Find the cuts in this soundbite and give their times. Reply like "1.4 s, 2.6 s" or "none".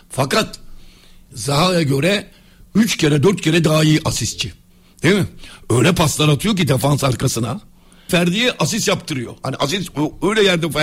8.1 s